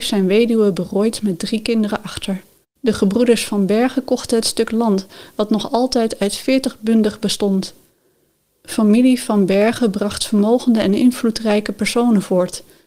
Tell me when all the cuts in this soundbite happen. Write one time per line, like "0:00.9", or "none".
none